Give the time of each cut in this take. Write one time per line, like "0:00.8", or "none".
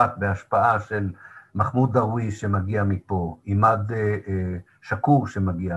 none